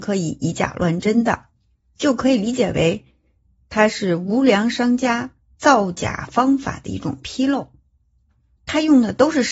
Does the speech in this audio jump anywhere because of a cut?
no; 0 cuts

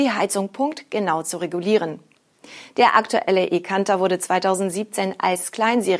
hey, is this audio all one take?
yes; 0 cuts

